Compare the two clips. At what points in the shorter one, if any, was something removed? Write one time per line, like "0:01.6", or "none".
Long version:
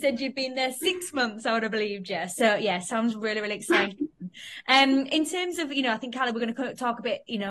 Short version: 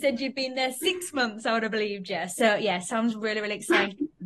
none